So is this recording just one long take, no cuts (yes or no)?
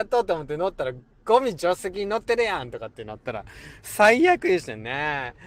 no